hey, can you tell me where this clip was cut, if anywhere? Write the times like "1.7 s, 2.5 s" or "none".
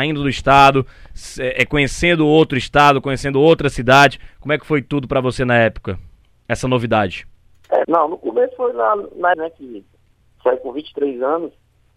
7.8 s, 9.3 s